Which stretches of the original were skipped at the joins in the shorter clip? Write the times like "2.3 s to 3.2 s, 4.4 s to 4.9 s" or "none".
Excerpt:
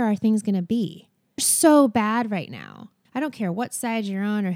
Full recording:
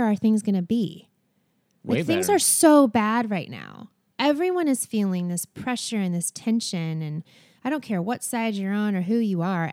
1.4 s to 2.4 s, 4.0 s to 7.5 s